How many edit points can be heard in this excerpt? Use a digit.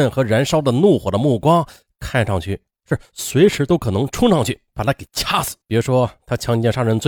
1